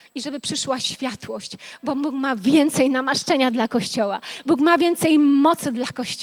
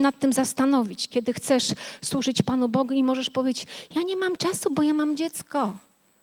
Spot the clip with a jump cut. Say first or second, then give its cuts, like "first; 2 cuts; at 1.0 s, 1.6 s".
first; 1 cut; at 4.4 s